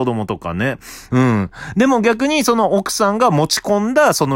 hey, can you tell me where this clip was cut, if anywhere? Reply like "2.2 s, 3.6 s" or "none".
1.1 s